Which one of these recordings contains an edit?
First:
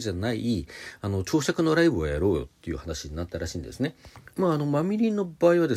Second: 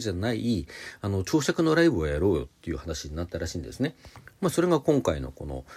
first; 1 cut; at 4.3 s

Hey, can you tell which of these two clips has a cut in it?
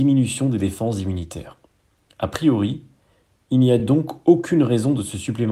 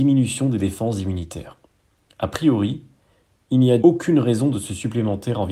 second; 1 cut; at 3.8 s

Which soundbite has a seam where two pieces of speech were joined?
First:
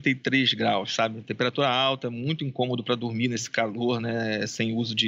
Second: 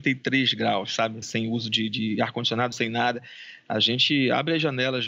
second; 2 cuts; at 1.2 s, 2.7 s

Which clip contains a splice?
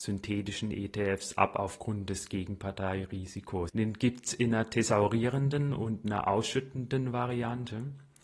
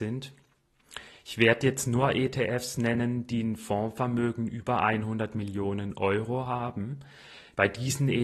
first; 1 cut; at 3.7 s

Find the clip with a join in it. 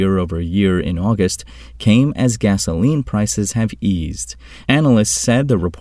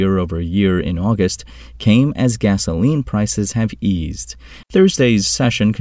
second; 1 cut; at 4.6 s

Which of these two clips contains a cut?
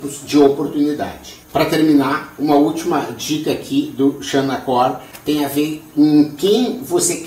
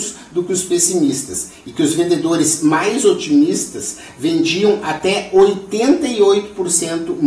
first; 1 cut; at 1.4 s

